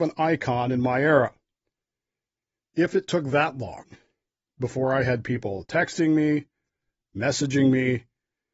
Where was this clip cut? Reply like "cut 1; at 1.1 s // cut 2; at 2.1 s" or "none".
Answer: cut 1; at 2.7 s